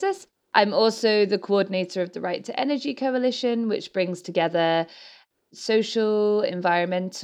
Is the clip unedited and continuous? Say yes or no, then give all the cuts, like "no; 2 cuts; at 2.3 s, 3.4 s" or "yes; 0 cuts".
yes; 0 cuts